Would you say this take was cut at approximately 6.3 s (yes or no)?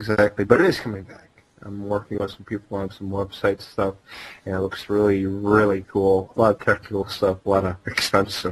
yes